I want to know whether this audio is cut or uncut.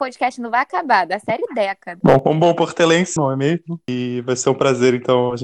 cut